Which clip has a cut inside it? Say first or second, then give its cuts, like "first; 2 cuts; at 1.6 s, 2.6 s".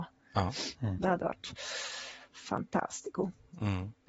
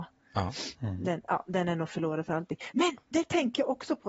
first; 1 cut; at 1.0 s